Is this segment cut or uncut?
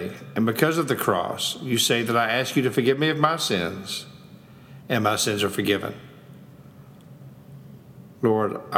uncut